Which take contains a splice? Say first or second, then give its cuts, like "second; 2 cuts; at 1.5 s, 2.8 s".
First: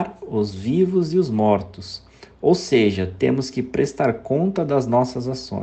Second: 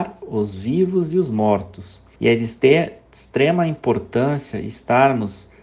second; 1 cut; at 2.2 s